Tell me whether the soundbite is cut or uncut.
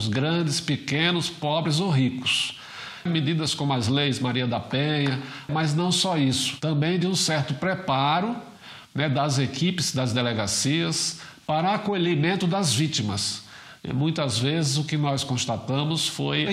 cut